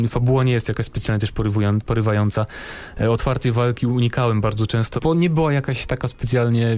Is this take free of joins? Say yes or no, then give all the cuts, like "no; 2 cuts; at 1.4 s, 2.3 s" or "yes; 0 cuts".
no; 1 cut; at 5.0 s